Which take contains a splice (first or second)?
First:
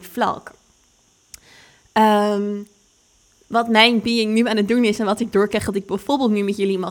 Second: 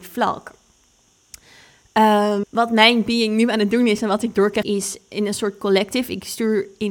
second